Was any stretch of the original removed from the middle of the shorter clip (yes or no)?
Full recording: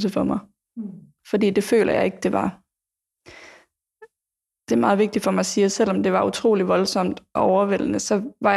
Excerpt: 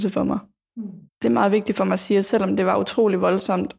yes